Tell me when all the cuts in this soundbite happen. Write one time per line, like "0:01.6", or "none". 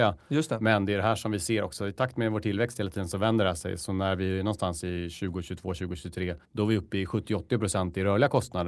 0:06.4